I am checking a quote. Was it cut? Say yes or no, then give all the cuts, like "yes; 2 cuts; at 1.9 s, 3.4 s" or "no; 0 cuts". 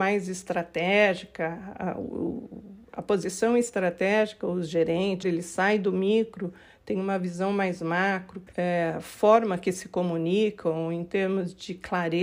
yes; 2 cuts; at 5.2 s, 8.5 s